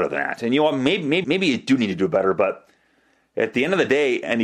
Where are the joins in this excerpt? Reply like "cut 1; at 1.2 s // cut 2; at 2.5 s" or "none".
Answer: cut 1; at 1.2 s